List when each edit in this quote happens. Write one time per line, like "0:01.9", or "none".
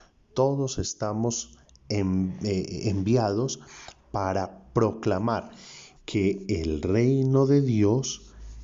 0:06.0